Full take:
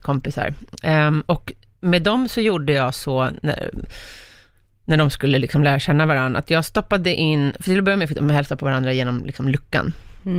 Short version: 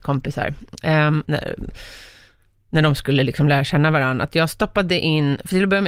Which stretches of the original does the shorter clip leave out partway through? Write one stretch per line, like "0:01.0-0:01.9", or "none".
0:01.2-0:03.4

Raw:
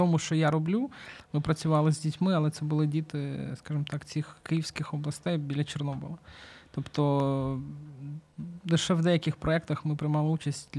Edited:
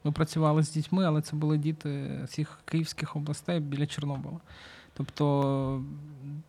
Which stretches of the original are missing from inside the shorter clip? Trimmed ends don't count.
0:03.6-0:04.1

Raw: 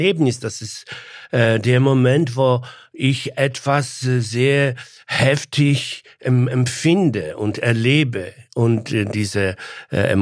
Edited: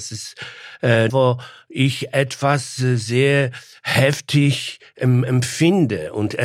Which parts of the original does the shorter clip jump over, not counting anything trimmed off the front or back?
0:01.6-0:02.3

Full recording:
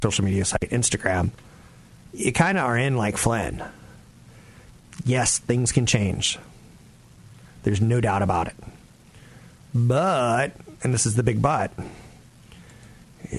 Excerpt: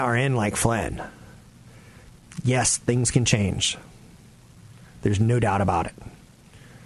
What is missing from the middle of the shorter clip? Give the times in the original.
none

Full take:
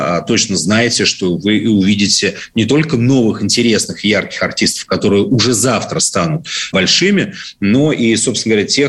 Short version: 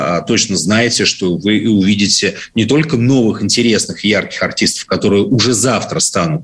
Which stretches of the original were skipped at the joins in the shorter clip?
none

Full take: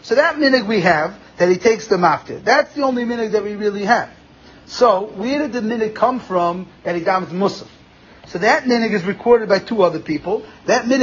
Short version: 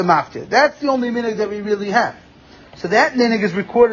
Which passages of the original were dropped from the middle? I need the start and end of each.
0:04.6-0:08.2

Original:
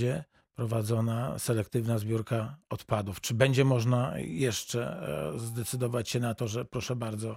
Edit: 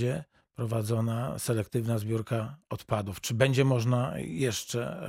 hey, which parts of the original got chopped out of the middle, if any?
none

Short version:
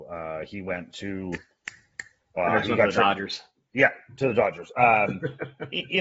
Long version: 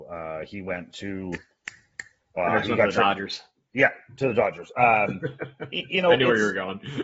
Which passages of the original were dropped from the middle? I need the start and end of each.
none

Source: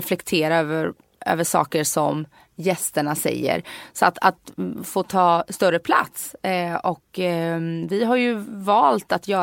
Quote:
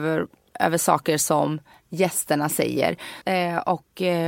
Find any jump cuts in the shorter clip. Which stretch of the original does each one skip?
0:03.9-0:06.4

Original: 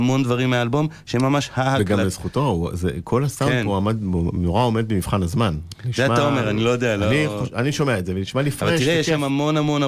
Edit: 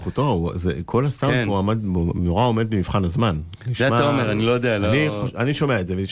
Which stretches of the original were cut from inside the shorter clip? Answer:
none

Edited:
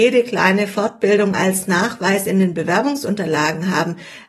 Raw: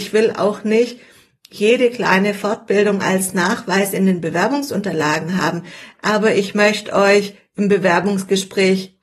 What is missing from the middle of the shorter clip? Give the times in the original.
none

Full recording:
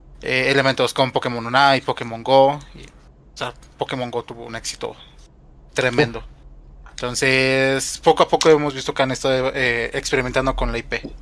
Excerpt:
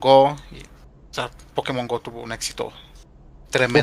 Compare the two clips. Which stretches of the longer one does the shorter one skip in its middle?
none

